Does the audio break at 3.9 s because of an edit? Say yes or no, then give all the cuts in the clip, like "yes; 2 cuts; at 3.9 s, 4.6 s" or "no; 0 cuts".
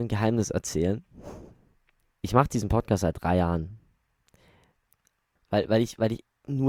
no; 2 cuts; at 2.1 s, 5.4 s